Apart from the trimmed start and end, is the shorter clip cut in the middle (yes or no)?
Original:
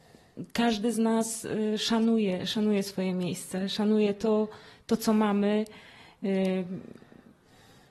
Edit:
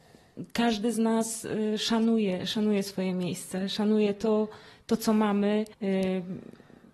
yes